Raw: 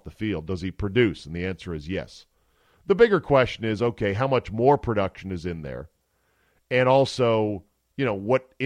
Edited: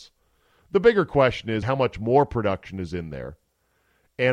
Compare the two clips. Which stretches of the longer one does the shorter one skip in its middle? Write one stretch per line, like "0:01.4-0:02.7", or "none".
0:03.8-0:04.1